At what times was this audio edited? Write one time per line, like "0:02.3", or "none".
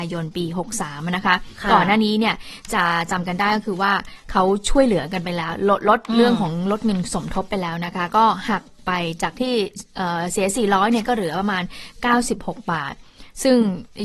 none